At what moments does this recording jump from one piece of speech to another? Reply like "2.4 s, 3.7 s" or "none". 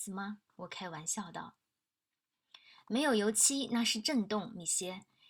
none